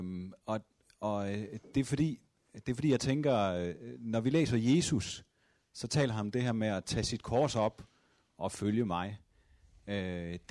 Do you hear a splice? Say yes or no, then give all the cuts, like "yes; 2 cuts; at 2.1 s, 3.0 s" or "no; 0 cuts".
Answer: no; 0 cuts